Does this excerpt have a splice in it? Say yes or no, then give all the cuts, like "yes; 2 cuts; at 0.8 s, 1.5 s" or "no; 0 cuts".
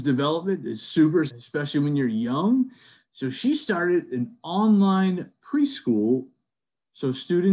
yes; 1 cut; at 1.3 s